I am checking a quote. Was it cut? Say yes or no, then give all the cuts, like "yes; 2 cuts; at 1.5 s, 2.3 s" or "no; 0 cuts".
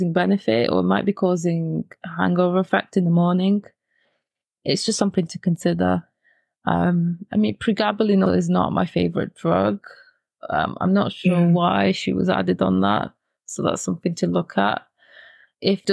yes; 1 cut; at 8.3 s